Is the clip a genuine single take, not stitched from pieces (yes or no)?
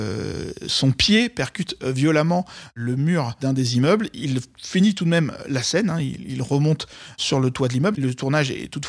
no